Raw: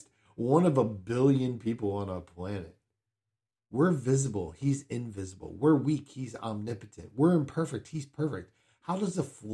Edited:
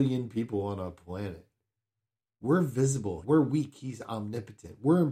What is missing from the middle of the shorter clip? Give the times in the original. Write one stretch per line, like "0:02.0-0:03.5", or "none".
0:04.5-0:05.6